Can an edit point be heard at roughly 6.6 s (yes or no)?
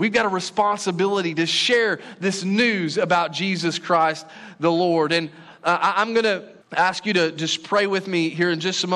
yes